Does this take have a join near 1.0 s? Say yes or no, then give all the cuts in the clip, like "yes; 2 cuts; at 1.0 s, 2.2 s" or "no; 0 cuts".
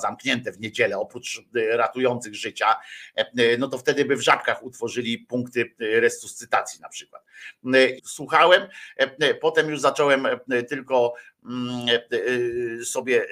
no; 1 cut; at 8.0 s